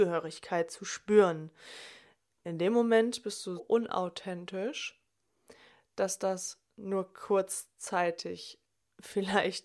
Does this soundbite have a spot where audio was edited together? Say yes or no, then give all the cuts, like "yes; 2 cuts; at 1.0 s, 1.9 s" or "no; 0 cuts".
yes; 1 cut; at 3.6 s